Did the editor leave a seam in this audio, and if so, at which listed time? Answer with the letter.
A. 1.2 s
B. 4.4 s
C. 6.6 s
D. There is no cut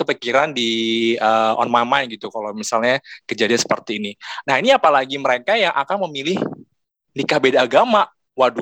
B